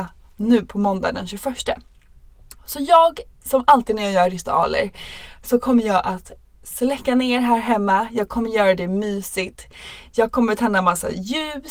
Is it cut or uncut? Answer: uncut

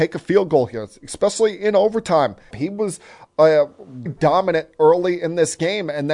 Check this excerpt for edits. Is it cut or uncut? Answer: cut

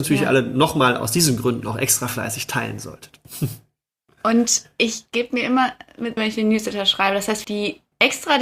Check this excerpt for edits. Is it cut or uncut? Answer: cut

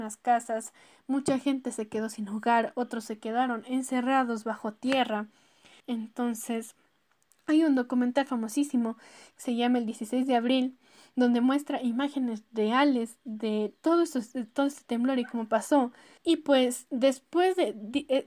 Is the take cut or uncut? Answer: cut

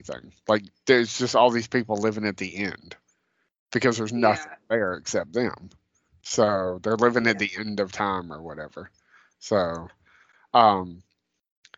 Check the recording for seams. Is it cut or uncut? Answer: uncut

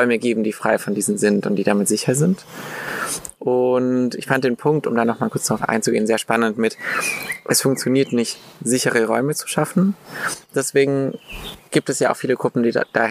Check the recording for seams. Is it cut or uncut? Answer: uncut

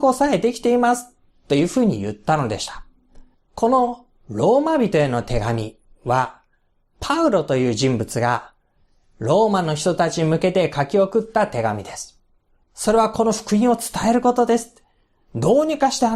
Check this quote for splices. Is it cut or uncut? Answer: cut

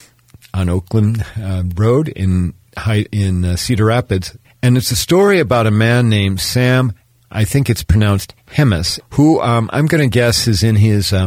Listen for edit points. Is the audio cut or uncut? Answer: cut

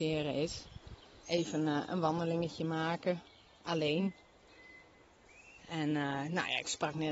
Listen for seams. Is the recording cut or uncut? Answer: cut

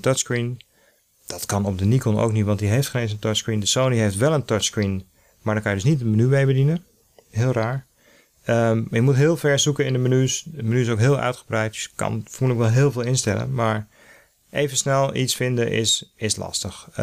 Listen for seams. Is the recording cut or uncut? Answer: uncut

